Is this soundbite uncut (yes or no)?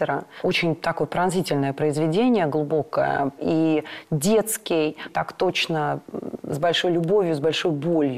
no